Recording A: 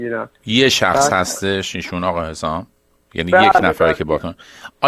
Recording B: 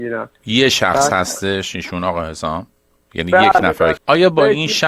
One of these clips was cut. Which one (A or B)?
B